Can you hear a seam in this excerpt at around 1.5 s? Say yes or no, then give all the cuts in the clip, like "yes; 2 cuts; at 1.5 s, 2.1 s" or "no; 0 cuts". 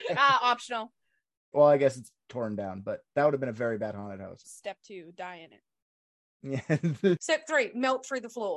yes; 2 cuts; at 1.5 s, 4.4 s